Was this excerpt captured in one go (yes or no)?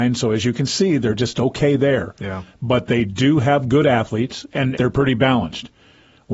no